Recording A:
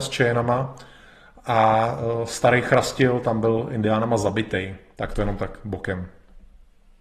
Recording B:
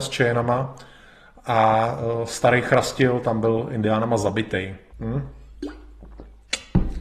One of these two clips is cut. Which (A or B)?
B